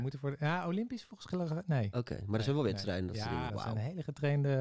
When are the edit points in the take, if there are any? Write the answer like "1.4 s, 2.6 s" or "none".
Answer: 3.5 s

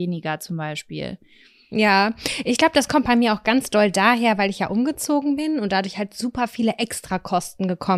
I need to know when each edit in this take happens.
none

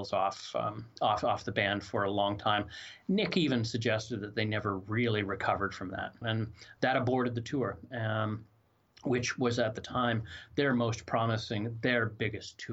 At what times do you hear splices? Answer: 6.2 s

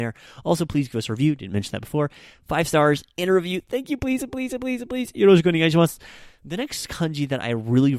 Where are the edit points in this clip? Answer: 6.4 s

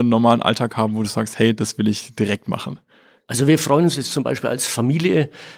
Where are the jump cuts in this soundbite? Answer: 1.6 s

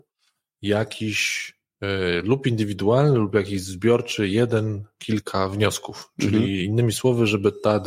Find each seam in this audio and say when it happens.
none

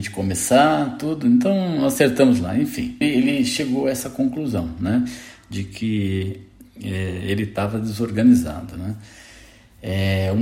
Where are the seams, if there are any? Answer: 3.0 s

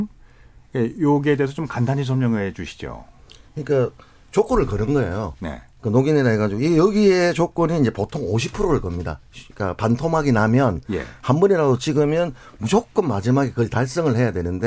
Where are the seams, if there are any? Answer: none

